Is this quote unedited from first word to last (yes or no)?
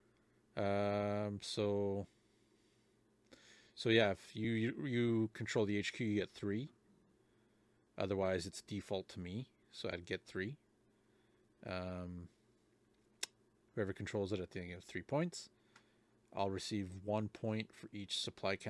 yes